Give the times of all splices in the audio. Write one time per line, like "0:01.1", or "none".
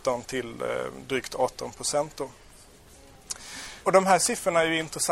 0:03.8